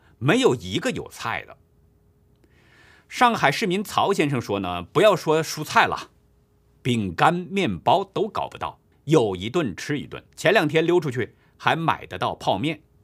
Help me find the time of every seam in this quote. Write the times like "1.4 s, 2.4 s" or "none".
8.9 s, 10.3 s